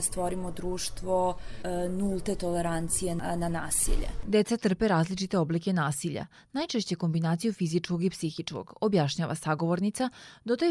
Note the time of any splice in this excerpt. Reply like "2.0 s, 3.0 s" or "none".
4.2 s